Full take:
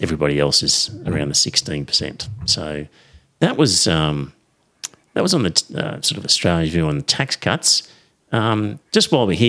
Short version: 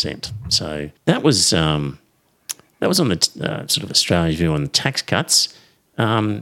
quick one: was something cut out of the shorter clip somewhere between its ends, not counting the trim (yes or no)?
yes